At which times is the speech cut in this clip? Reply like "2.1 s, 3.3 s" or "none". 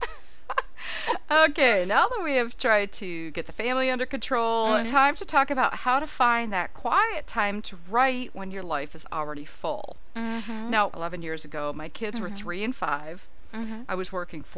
4.8 s, 10.9 s